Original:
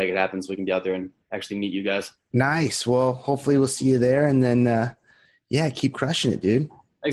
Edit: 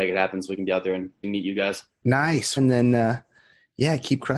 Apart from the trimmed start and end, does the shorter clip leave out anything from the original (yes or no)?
yes